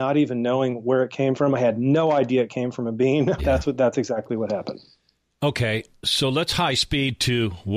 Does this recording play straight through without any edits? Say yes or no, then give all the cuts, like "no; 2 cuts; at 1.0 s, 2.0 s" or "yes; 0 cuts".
no; 1 cut; at 3.4 s